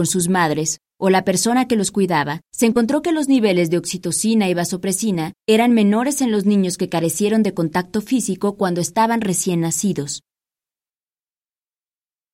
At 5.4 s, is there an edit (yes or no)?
yes